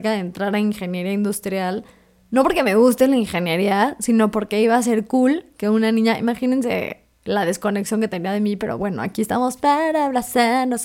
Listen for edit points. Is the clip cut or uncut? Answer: uncut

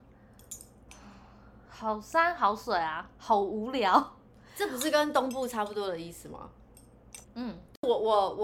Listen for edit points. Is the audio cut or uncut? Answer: cut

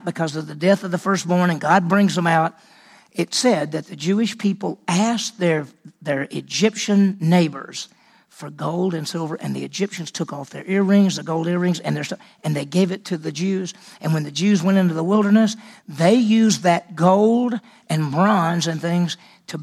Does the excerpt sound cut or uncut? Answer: uncut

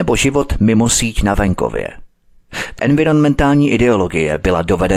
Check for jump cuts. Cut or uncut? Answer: cut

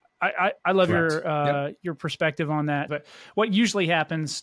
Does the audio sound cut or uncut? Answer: cut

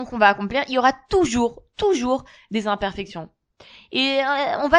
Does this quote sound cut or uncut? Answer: uncut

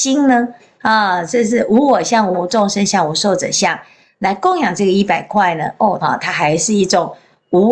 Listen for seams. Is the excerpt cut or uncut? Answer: cut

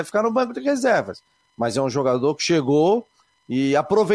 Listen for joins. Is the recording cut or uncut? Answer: uncut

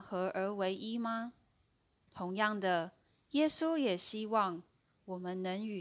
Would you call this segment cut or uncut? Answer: cut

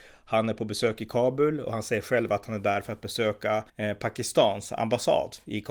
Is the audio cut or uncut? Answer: cut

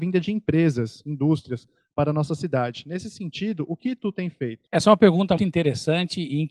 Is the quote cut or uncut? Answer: cut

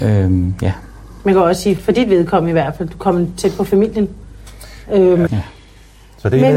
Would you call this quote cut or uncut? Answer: cut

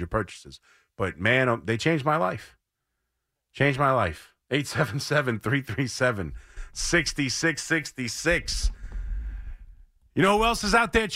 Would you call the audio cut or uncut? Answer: cut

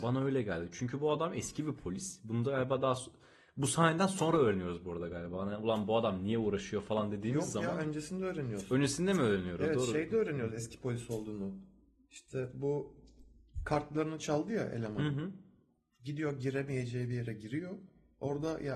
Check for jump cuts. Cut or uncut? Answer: uncut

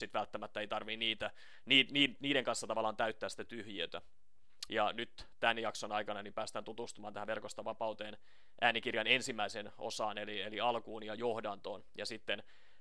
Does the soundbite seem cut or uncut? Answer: cut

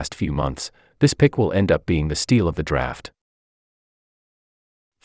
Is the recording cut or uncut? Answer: uncut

